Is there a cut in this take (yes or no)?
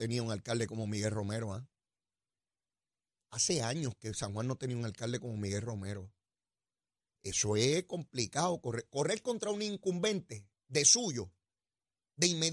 no